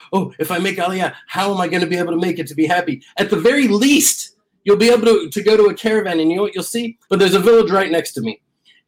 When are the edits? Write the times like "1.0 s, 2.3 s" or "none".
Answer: 7.1 s